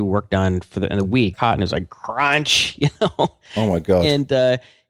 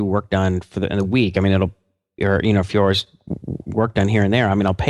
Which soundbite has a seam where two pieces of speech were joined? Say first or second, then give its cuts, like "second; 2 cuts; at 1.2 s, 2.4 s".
first; 1 cut; at 1.3 s